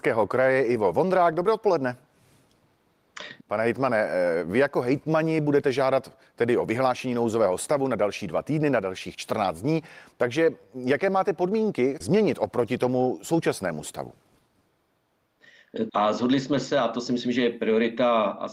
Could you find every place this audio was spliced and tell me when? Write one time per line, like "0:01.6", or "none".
0:03.4
0:12.0
0:15.9

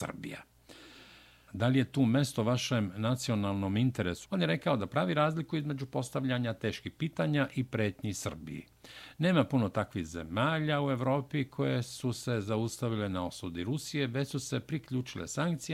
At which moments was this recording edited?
0:01.5
0:04.2

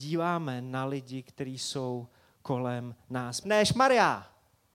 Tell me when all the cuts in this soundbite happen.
0:03.4

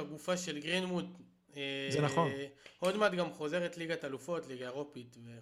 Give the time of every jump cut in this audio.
none

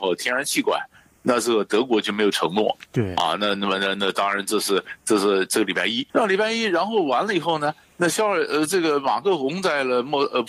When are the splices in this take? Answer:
0:06.1

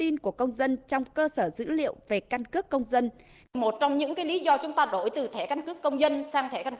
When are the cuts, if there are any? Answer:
0:03.4

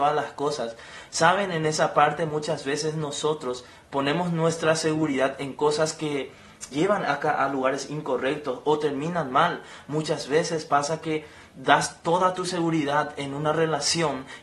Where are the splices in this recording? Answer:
0:06.7

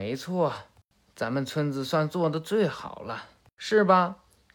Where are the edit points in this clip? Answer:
none

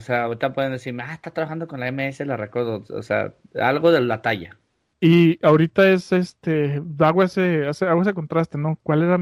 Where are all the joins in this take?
0:04.9

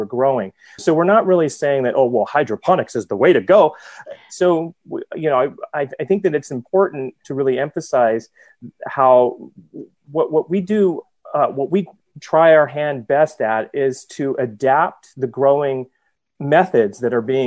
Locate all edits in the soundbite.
0:04.3
0:07.2
0:12.0

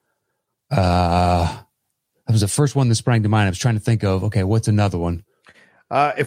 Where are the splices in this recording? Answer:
none

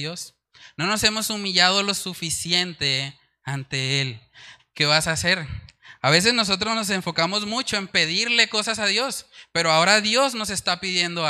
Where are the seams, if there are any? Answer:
0:04.6

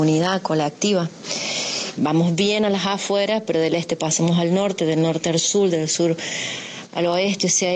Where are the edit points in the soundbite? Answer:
0:02.0

